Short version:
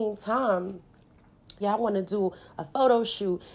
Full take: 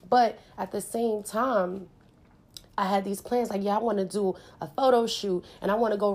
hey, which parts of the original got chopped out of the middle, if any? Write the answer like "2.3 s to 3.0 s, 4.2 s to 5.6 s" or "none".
2.7 s to 3.6 s